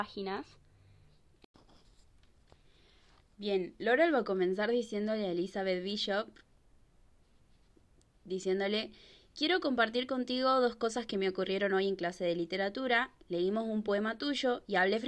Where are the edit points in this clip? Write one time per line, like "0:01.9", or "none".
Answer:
none